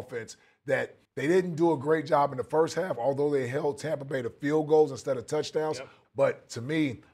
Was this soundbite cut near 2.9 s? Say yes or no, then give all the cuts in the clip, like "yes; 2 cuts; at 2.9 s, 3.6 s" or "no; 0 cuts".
no; 2 cuts; at 1.0 s, 6.0 s